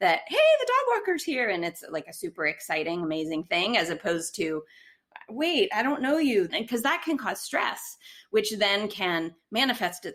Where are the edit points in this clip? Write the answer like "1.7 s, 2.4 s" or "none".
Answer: 6.5 s